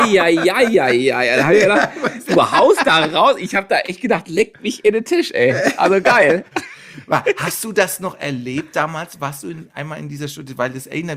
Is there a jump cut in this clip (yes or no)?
no